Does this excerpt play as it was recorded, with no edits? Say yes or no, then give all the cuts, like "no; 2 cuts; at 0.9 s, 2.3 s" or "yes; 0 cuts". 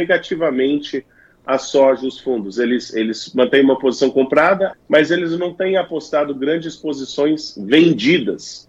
no; 1 cut; at 4.7 s